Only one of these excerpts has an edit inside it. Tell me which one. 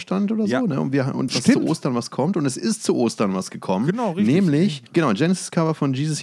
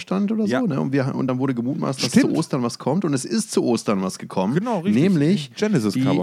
first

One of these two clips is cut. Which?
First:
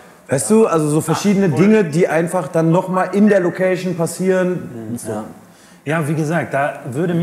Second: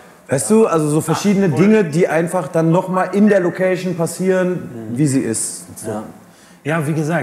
first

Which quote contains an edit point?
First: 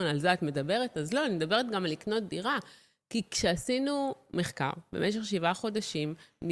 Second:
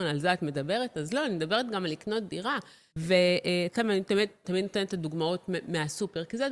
second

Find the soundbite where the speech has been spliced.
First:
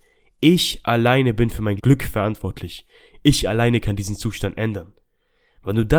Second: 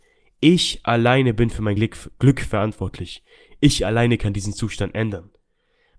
first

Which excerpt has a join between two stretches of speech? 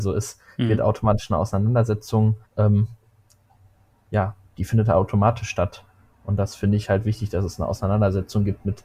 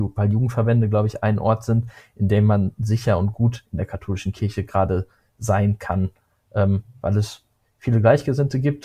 first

